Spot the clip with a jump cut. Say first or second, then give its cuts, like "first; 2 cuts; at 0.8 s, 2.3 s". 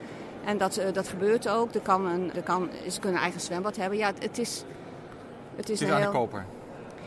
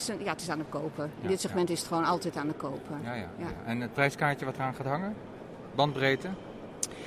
first; 1 cut; at 2.3 s